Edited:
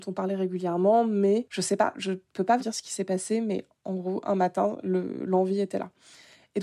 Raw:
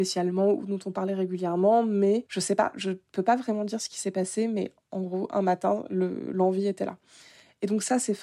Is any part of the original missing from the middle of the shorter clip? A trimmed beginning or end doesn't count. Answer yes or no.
yes